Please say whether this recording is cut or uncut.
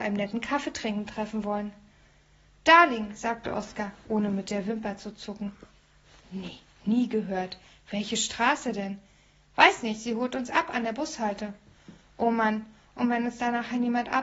uncut